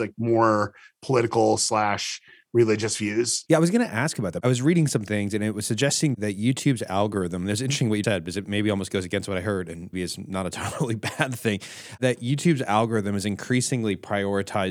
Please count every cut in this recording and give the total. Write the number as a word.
three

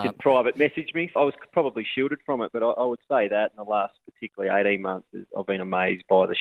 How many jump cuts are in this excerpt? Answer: one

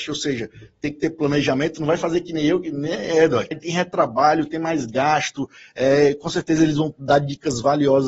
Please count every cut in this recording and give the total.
one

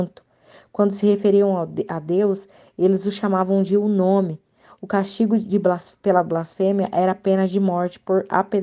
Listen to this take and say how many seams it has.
zero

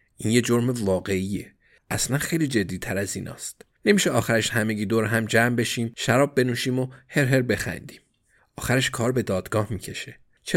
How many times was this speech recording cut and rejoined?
zero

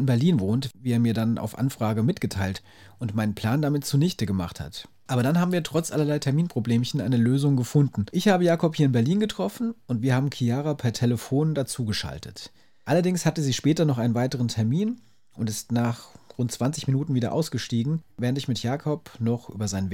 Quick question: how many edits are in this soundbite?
zero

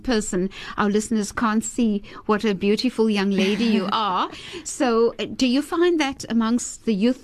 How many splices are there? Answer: zero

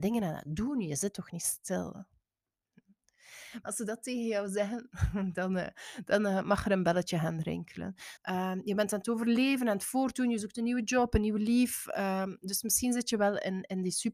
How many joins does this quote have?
two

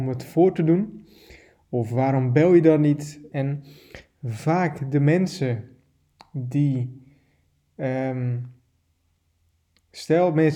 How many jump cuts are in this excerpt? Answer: one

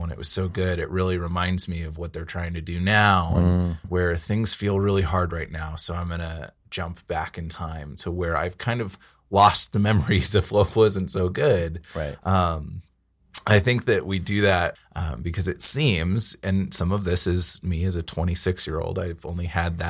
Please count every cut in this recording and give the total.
two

